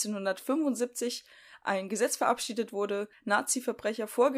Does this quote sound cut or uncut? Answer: cut